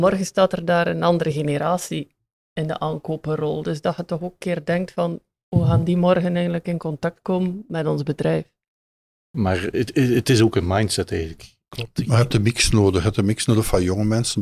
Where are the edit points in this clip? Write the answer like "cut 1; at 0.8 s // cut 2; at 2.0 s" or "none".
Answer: cut 1; at 9.2 s